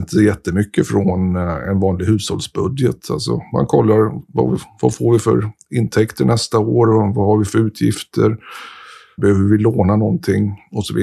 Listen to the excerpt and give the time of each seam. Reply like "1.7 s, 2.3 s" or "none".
9.2 s